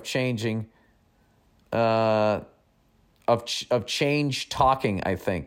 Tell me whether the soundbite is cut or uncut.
uncut